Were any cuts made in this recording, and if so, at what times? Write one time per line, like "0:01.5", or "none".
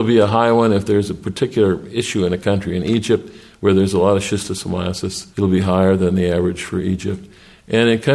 0:05.3